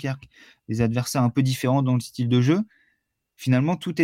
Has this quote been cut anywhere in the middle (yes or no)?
no